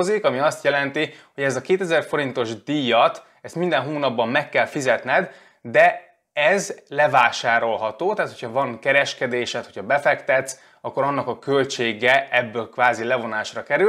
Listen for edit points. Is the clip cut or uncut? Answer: uncut